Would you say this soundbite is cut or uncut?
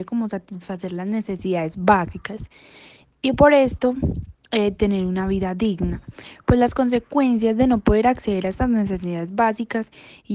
uncut